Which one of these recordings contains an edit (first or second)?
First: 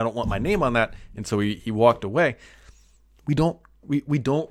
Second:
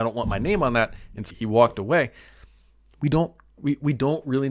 second